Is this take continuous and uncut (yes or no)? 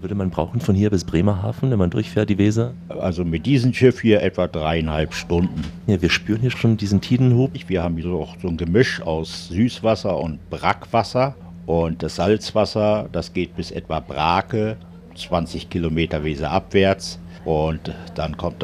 yes